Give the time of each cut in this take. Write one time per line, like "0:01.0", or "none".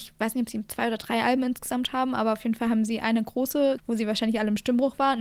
0:03.8